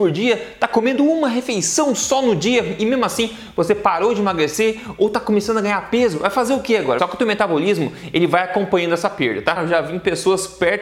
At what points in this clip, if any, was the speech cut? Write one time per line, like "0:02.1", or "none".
0:07.0
0:09.6